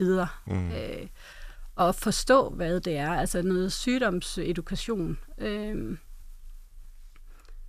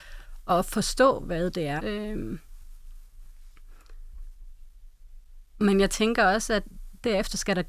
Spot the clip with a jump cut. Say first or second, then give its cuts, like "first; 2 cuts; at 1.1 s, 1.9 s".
second; 1 cut; at 1.8 s